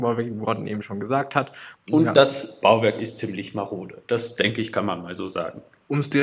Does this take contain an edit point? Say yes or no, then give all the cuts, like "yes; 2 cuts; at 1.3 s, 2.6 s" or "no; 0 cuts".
yes; 1 cut; at 1.7 s